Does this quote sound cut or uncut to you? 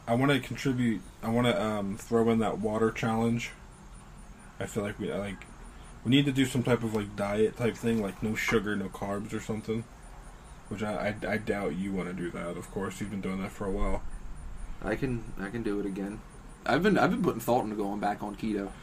uncut